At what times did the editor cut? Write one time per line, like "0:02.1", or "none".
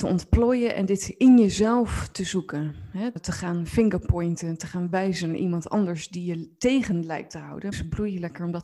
0:03.2
0:07.7